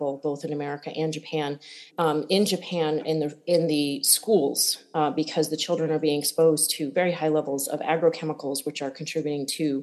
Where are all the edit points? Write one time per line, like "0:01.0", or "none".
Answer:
0:01.9

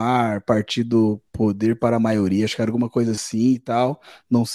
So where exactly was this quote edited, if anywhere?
0:01.3

